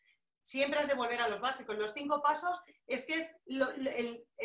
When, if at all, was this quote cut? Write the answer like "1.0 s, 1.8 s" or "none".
none

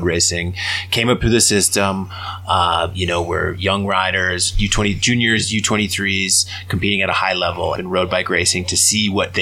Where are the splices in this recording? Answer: 7.8 s

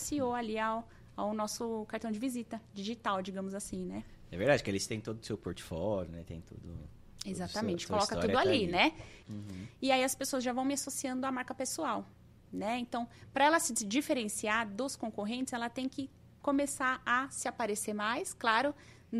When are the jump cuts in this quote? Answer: 9.2 s

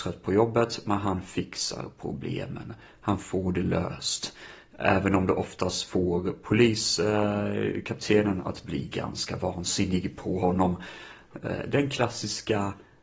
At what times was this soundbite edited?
none

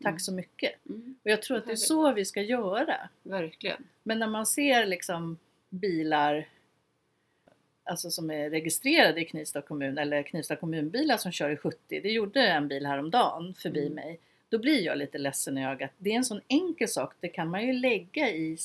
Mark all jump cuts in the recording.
none

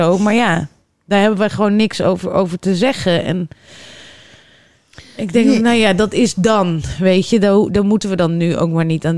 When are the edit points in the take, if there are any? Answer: none

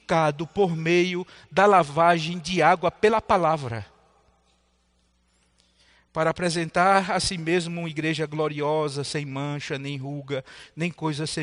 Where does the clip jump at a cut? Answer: none

